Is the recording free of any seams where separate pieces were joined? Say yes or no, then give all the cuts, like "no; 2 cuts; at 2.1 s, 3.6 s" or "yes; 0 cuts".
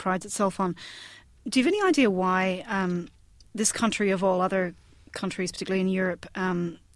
yes; 0 cuts